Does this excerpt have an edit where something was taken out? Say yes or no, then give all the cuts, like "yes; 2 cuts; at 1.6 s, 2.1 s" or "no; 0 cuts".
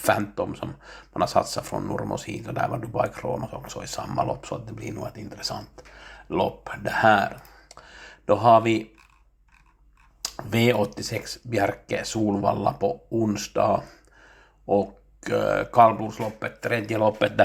no; 0 cuts